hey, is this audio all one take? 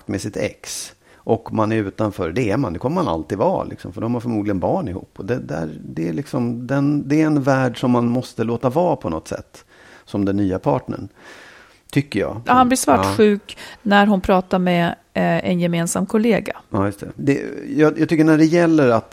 no; 2 cuts; at 12.5 s, 17.2 s

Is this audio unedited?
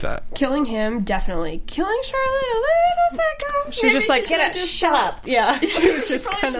no; 1 cut; at 4.3 s

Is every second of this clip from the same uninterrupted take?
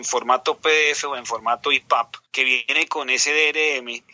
no; 1 cut; at 2.2 s

